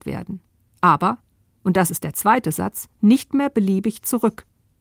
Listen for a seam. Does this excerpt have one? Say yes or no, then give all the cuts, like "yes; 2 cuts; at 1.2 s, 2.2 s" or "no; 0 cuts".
no; 0 cuts